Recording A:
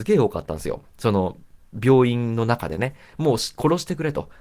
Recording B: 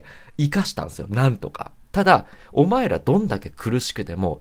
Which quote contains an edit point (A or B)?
B